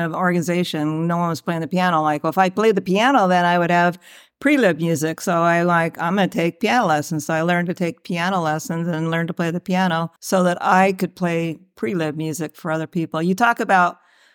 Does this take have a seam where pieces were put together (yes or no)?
yes